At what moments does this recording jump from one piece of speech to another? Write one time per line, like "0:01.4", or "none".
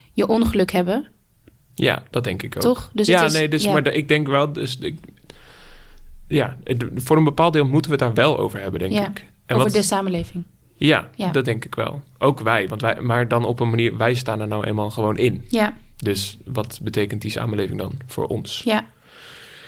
none